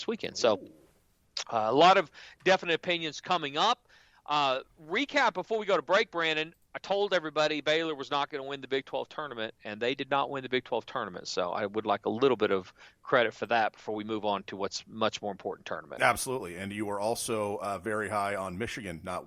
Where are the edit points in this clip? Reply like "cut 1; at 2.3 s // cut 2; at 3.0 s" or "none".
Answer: none